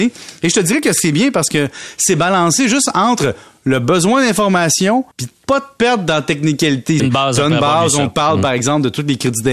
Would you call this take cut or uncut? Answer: cut